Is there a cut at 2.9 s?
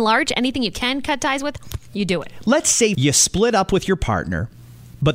yes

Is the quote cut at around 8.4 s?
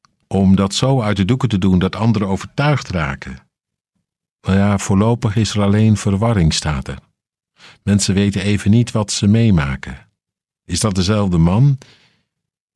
no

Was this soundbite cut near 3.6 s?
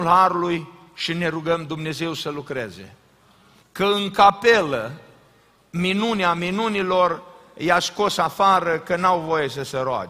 yes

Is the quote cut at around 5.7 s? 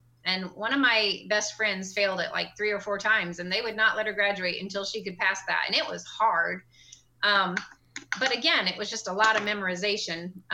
no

